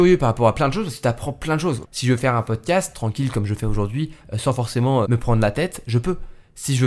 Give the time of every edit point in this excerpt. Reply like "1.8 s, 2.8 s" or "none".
1.8 s, 5.0 s